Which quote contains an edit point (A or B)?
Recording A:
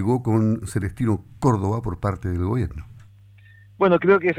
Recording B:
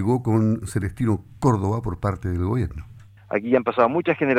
B